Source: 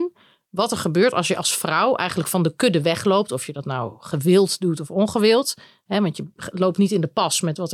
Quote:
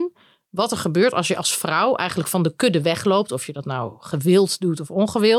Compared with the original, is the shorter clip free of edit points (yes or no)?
yes